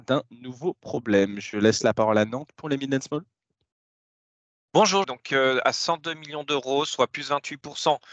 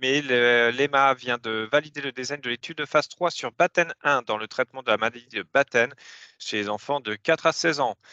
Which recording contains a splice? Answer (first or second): first